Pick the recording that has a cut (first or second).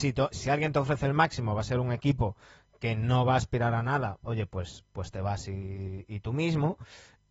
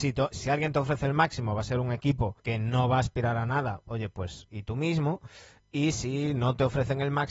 second